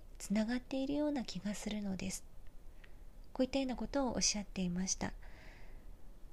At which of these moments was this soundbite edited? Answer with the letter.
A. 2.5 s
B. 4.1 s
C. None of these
C